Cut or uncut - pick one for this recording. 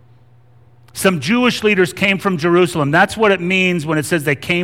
uncut